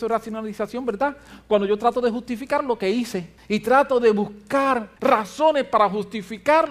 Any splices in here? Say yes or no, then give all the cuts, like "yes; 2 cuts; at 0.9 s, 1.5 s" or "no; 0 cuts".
yes; 1 cut; at 5.0 s